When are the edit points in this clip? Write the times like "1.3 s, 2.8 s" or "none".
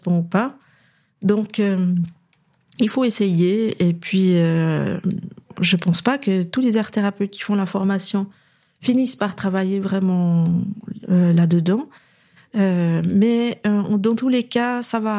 none